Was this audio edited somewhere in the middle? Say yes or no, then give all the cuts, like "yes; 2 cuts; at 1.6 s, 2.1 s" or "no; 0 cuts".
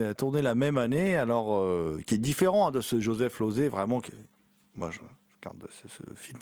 no; 0 cuts